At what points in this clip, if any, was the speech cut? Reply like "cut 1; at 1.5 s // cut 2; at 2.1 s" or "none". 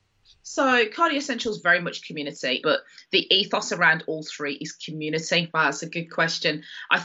cut 1; at 2.6 s // cut 2; at 5.5 s